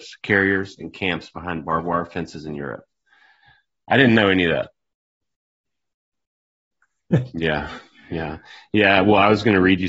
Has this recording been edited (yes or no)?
yes